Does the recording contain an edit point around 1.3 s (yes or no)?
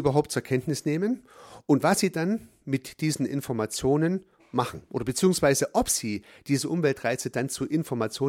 no